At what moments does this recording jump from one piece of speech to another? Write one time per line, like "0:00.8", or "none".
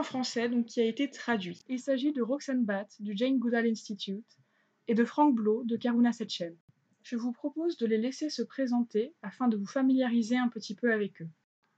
none